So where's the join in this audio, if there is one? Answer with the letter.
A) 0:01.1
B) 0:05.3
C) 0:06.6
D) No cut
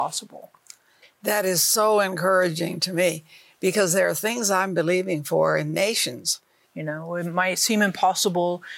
C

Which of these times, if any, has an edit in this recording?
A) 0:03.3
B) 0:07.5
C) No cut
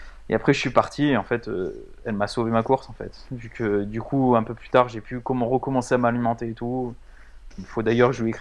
B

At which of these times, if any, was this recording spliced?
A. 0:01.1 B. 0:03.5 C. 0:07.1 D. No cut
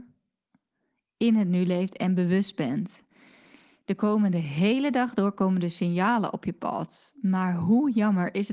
D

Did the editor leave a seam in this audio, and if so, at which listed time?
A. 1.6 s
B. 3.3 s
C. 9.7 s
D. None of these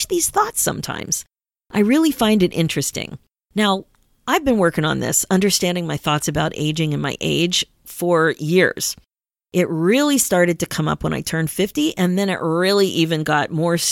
D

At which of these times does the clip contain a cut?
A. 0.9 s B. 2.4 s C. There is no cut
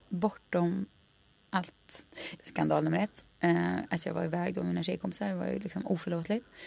B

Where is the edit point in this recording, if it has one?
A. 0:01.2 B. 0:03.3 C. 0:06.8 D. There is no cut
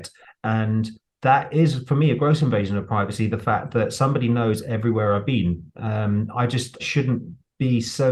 C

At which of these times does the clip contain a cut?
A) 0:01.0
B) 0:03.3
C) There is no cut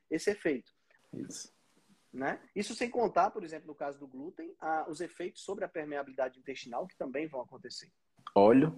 A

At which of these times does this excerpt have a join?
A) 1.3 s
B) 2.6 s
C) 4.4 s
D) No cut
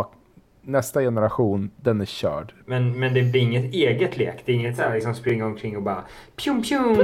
B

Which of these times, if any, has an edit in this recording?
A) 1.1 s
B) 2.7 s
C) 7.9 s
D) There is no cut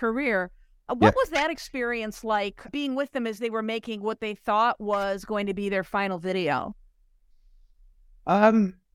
B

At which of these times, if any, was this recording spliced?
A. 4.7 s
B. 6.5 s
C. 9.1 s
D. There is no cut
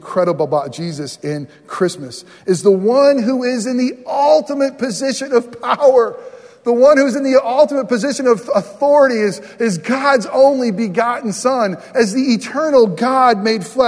D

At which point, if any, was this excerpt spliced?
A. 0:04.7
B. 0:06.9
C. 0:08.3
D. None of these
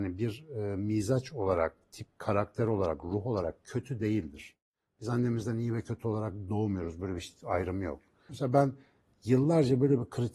C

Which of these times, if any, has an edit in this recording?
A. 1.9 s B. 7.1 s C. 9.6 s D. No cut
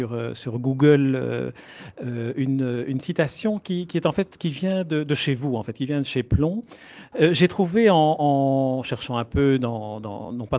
B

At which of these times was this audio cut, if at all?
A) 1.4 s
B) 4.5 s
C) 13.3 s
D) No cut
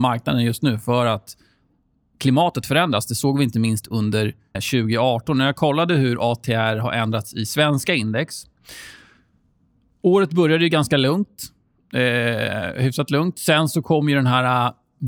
B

